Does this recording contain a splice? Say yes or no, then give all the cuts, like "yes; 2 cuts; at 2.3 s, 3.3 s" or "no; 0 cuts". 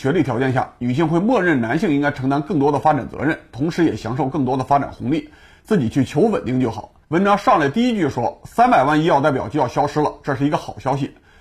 yes; 1 cut; at 7.0 s